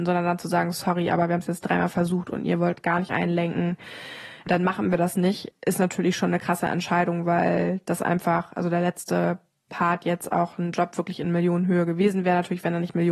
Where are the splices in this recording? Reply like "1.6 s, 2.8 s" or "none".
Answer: none